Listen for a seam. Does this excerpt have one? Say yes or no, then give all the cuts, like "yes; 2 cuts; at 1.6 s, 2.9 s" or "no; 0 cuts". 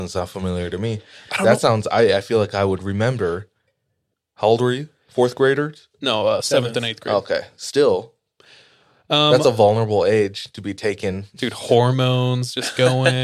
no; 0 cuts